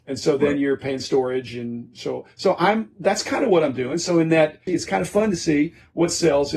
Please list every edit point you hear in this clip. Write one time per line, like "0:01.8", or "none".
0:04.7